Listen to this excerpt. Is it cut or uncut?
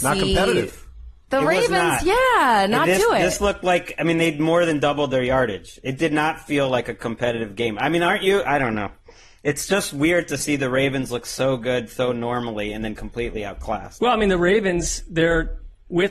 uncut